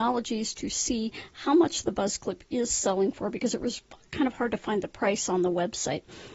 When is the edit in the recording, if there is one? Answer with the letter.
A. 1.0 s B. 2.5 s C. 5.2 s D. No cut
D